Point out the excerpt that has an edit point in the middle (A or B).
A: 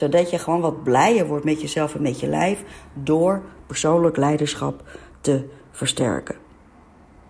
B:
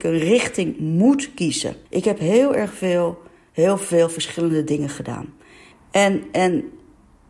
B